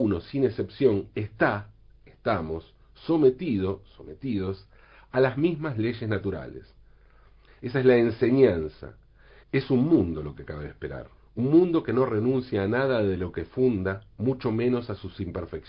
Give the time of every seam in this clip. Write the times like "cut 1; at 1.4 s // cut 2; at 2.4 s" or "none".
cut 1; at 7.5 s // cut 2; at 9.4 s // cut 3; at 11.2 s